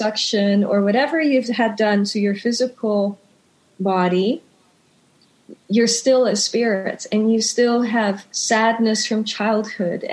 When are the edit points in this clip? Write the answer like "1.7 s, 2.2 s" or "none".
8.3 s